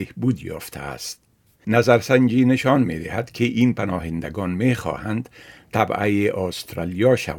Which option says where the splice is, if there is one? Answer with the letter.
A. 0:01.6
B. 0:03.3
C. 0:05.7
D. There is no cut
A